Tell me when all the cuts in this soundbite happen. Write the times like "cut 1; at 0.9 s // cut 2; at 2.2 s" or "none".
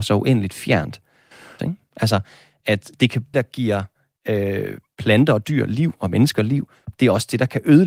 cut 1; at 1.6 s // cut 2; at 3.3 s